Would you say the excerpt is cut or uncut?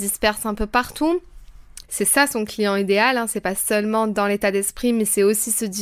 cut